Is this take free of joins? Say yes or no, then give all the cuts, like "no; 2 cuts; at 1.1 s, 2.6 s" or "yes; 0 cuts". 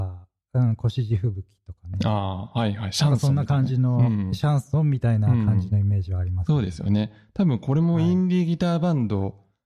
yes; 0 cuts